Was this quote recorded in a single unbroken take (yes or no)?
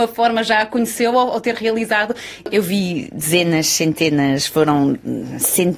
no